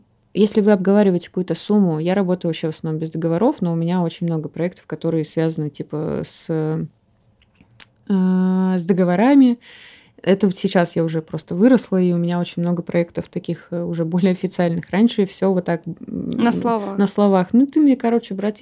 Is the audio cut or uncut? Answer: uncut